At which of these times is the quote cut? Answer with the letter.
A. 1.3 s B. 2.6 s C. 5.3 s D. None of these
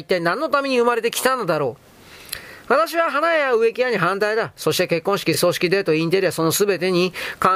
D